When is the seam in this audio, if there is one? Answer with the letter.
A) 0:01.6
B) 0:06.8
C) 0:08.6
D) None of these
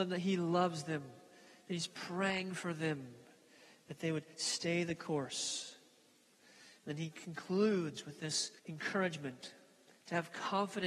C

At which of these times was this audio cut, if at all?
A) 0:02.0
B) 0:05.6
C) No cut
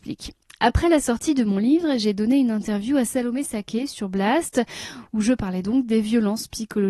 C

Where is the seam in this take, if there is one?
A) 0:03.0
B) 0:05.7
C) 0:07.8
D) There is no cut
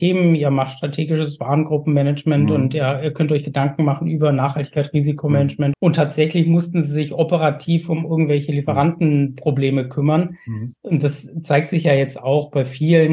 B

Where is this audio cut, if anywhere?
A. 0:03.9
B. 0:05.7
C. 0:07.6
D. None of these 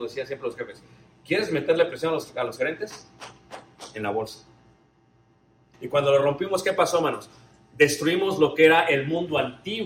B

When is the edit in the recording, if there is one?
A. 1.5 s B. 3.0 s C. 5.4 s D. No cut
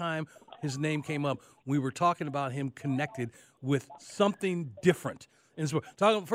D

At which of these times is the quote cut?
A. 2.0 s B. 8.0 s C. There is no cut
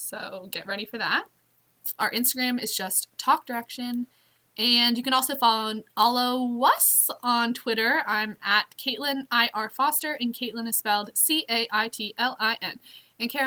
A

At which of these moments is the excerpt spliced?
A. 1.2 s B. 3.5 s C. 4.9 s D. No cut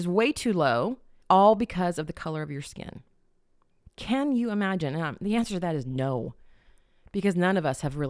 A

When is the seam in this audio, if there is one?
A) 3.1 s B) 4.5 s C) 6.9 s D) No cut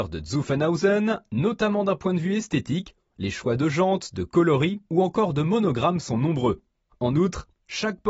C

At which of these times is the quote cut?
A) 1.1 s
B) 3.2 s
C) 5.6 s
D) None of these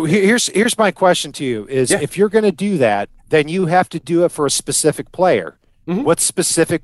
B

